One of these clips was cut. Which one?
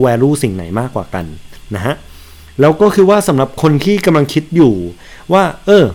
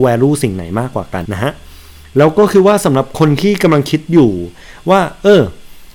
second; 1 cut; at 1.3 s

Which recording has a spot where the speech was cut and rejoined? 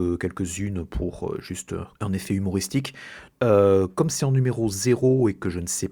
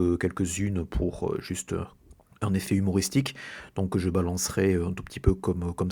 first; 2 cuts; at 1.9 s, 3.3 s

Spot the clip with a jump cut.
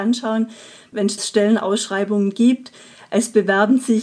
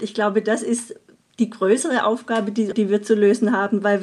second; 1 cut; at 2.7 s

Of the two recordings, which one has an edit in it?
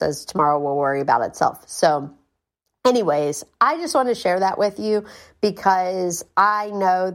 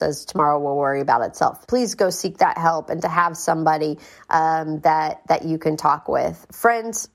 second; 1 cut; at 1.7 s

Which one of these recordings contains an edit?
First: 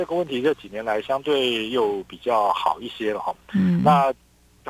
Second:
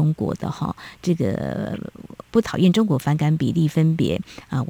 second; 1 cut; at 2.2 s

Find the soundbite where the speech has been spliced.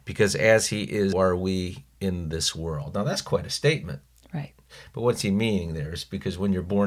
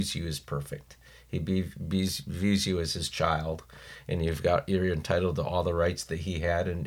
first; 1 cut; at 1.1 s

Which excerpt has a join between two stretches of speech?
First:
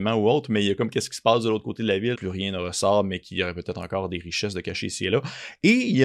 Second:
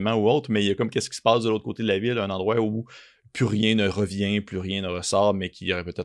first; 1 cut; at 2.1 s

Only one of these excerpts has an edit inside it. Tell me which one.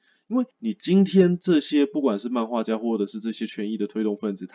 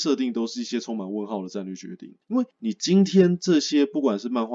second; 1 cut; at 2.2 s

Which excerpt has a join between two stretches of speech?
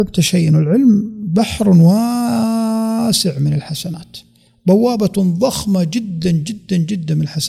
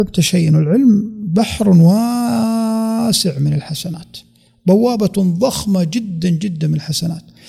second; 1 cut; at 6.2 s

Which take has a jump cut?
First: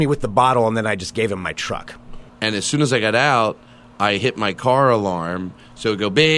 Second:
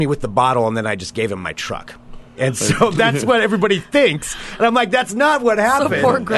first; 1 cut; at 2.3 s

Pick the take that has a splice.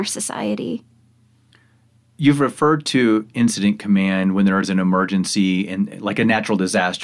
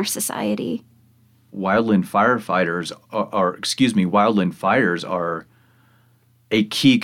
second; 1 cut; at 1.5 s

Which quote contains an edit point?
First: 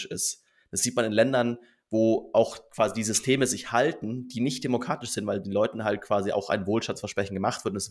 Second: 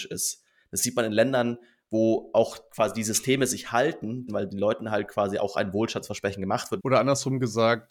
second; 2 cuts; at 4.3 s, 6.8 s

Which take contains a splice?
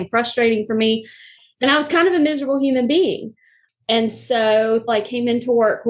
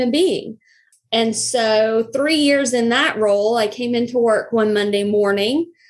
first; 1 cut; at 4.9 s

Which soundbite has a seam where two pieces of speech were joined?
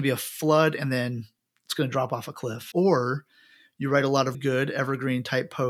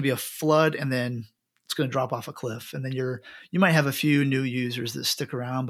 first; 2 cuts; at 2.7 s, 4.3 s

